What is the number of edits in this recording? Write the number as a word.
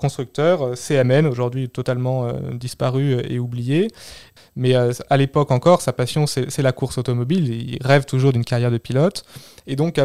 one